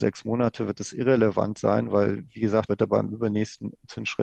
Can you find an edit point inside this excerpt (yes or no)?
yes